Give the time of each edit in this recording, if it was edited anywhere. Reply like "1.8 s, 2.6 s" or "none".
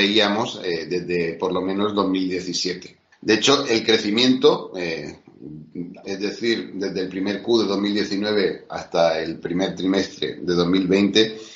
3.1 s, 6.0 s